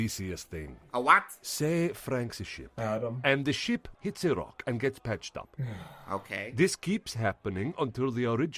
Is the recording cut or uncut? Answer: cut